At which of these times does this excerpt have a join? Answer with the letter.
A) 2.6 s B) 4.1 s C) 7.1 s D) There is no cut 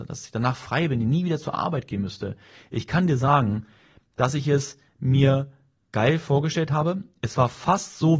D